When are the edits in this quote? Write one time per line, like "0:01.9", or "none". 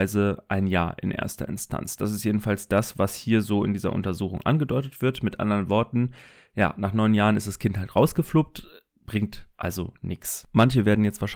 none